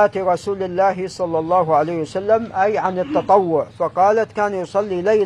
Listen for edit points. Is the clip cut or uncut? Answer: uncut